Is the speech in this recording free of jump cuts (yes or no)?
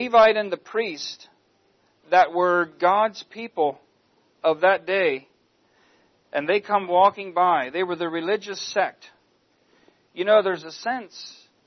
yes